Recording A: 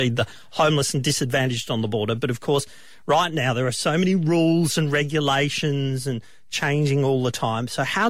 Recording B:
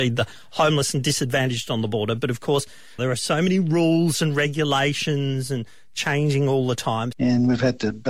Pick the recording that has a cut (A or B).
B